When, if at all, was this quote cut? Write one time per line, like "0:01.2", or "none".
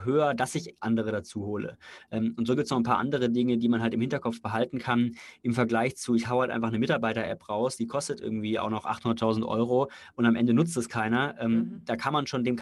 none